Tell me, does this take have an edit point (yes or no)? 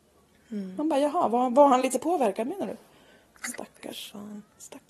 no